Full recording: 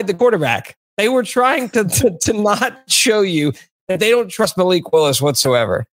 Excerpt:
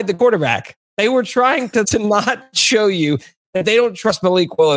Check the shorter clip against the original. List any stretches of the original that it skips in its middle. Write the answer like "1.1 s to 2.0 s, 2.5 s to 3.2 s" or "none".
1.8 s to 2.2 s